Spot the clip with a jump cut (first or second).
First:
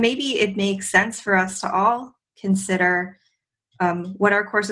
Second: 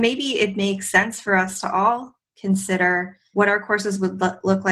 second